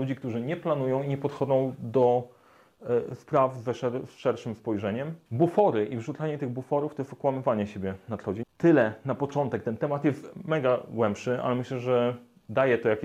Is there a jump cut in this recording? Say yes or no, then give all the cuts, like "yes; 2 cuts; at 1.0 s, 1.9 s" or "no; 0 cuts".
yes; 2 cuts; at 5.3 s, 8.4 s